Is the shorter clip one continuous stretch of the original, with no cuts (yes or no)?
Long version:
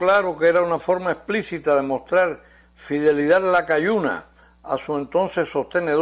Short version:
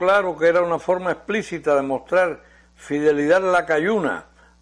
yes